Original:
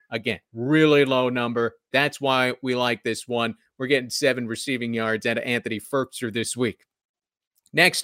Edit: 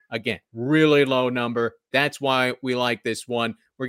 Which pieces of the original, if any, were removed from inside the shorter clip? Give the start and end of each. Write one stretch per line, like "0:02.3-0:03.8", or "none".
none